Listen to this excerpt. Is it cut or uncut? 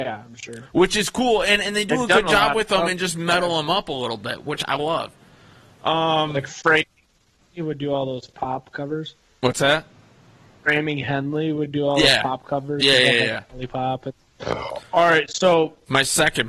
uncut